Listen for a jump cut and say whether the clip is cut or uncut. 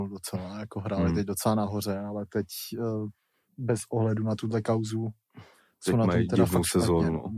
uncut